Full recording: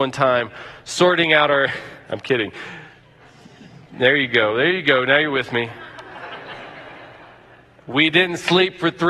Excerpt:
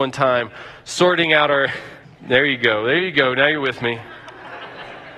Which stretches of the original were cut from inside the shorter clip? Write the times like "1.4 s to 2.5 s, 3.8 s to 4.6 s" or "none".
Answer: 2.0 s to 3.7 s